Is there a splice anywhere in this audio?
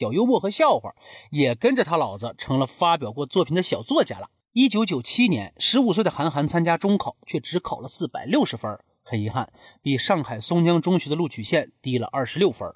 no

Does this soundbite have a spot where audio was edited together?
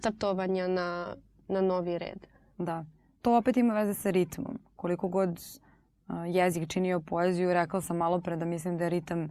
no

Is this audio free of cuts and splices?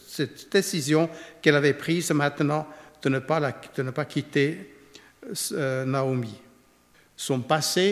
no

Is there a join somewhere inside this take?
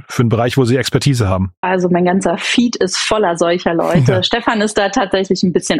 yes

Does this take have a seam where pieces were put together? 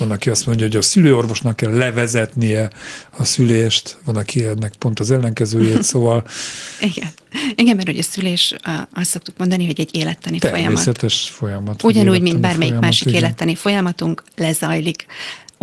no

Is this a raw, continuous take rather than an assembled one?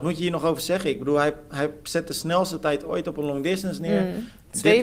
yes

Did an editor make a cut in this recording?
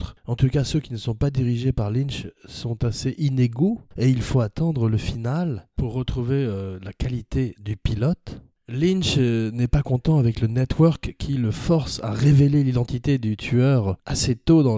no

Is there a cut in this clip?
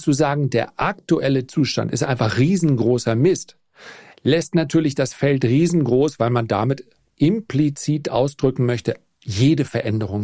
no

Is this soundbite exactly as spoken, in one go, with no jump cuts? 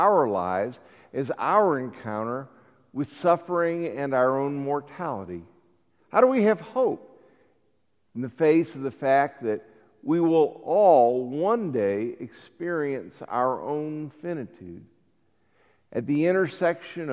no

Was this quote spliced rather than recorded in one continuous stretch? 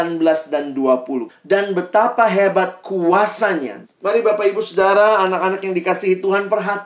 yes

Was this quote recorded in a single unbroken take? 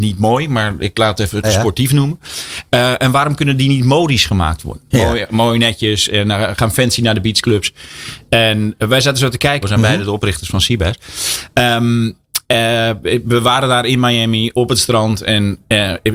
no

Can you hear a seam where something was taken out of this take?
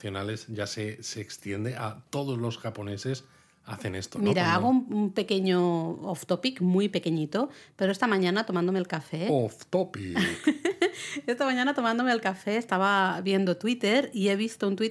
no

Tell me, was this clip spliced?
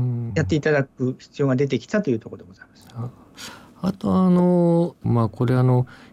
yes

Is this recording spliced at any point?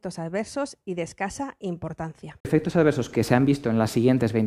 no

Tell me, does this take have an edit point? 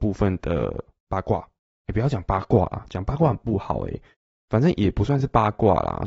no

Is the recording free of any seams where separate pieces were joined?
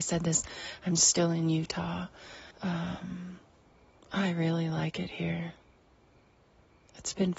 no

